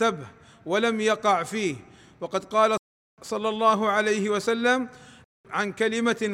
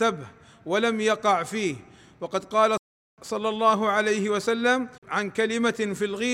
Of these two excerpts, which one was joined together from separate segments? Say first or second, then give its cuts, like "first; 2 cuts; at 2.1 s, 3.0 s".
second; 1 cut; at 5.0 s